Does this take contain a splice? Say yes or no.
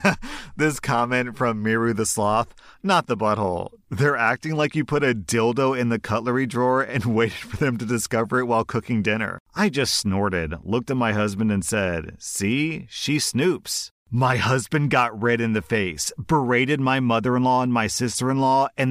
yes